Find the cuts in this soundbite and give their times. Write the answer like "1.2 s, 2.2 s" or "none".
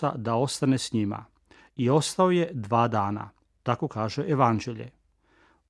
none